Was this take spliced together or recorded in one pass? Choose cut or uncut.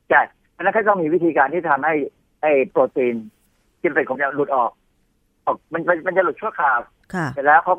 cut